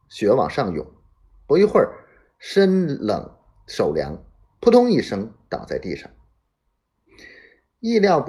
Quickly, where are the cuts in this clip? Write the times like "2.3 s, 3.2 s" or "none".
none